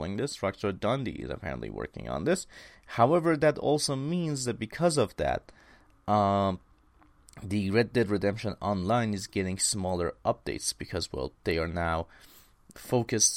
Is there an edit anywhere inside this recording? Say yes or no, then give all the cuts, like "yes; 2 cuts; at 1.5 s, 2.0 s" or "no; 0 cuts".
no; 0 cuts